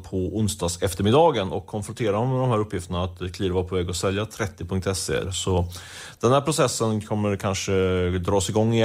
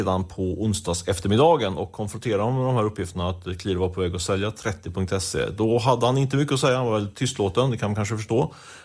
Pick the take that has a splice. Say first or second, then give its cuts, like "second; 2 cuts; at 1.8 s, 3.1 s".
first; 1 cut; at 5.2 s